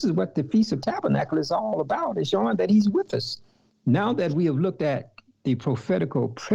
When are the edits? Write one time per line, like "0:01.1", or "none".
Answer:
0:02.3
0:03.7